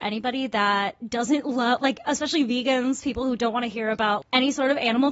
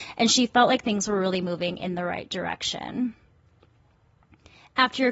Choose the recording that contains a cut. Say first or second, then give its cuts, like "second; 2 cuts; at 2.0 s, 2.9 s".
first; 1 cut; at 4.2 s